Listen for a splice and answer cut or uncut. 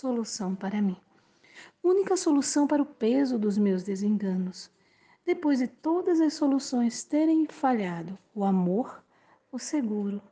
uncut